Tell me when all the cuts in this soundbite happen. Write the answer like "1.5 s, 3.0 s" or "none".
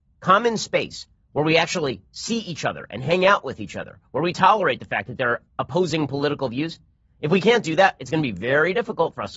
none